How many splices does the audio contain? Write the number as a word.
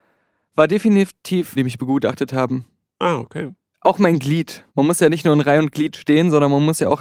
two